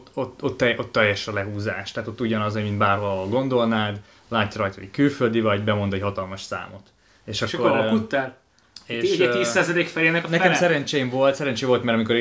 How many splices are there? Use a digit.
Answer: 0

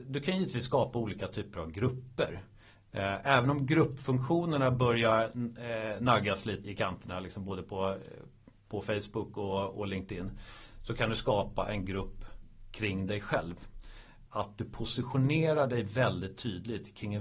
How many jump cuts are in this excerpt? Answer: 2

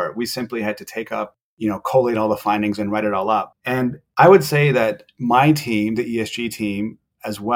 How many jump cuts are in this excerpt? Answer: 1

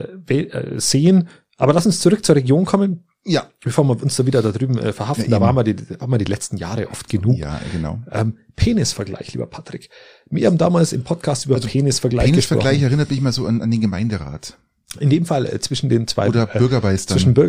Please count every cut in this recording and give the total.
0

